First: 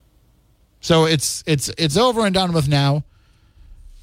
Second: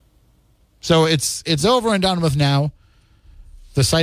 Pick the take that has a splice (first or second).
second